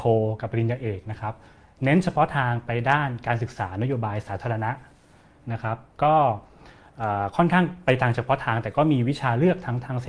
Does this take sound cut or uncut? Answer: uncut